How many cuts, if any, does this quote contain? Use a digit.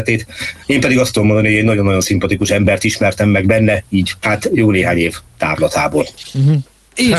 1